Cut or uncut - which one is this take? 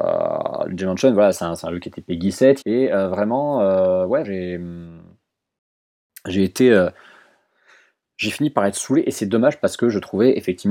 cut